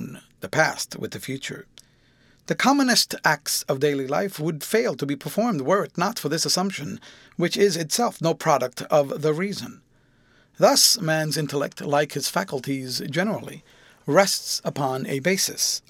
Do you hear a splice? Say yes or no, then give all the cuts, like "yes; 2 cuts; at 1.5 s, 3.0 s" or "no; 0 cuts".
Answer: no; 0 cuts